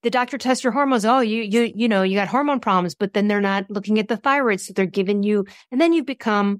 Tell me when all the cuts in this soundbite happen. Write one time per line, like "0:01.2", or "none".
none